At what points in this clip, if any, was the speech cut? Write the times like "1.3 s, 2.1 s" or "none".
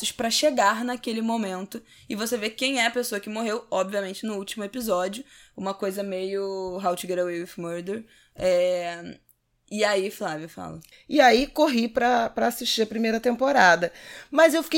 10.9 s